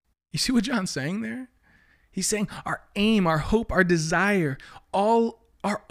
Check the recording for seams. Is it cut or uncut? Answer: uncut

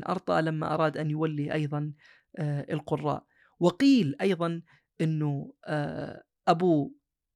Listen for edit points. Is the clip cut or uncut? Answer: uncut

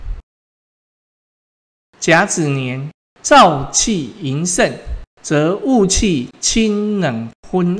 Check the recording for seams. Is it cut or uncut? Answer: cut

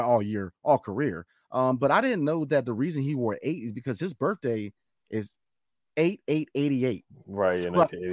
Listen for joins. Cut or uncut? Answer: uncut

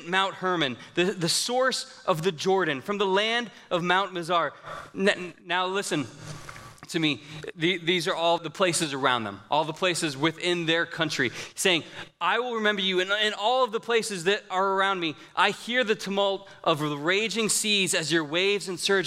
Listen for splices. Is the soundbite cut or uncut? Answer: cut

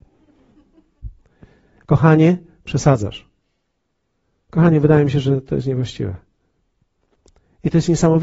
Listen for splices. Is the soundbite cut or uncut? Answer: cut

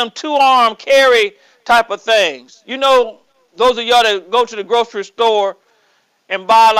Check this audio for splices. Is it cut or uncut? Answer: uncut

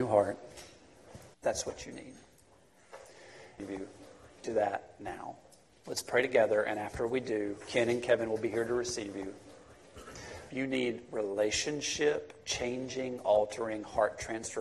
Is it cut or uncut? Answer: cut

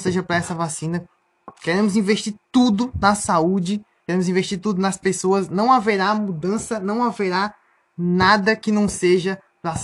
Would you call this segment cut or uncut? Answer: uncut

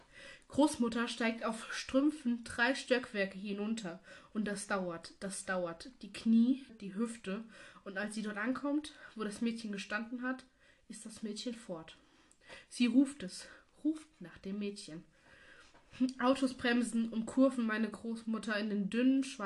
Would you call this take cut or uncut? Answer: cut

